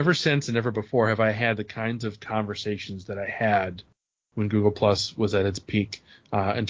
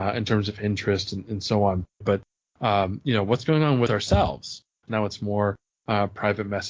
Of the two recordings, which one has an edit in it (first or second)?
second